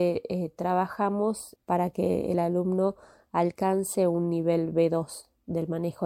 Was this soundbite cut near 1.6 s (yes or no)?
yes